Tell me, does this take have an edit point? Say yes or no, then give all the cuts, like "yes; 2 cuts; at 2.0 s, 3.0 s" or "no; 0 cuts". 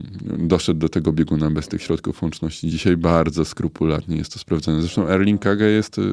no; 0 cuts